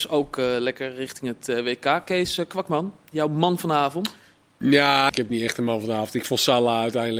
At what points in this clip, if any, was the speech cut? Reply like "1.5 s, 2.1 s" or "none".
5.1 s